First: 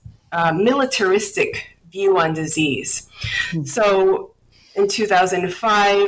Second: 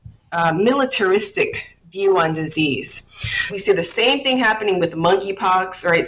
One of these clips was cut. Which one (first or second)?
second